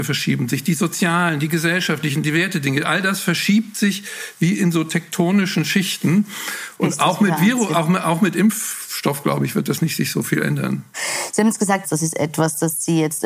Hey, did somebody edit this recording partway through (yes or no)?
yes